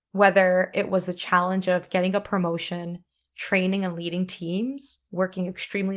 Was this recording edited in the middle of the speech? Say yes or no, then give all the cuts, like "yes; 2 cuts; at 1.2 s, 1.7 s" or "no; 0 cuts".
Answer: yes; 1 cut; at 5.0 s